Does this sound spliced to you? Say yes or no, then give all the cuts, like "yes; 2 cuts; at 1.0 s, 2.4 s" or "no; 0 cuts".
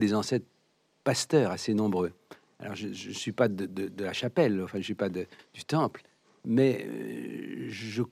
no; 0 cuts